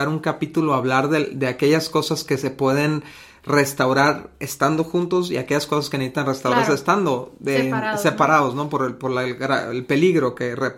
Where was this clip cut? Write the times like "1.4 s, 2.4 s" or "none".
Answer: none